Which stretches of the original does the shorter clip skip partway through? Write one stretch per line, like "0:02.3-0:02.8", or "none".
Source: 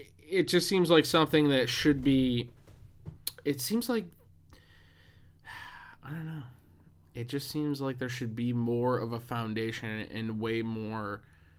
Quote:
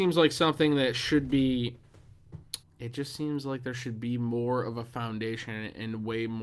0:03.4-0:07.0